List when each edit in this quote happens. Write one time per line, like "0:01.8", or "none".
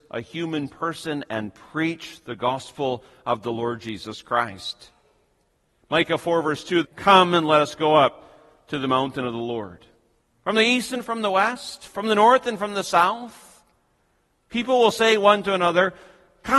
0:05.8
0:06.8
0:10.2